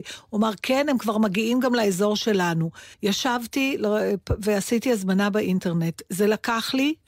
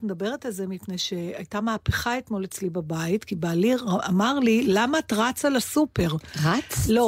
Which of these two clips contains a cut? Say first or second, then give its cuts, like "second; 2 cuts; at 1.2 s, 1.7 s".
first; 1 cut; at 2.9 s